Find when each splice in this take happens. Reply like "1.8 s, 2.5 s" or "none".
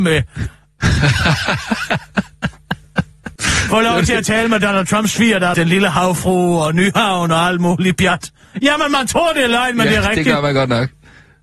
3.4 s, 5.5 s